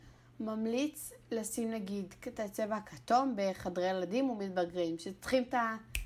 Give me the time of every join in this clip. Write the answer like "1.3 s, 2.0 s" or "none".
none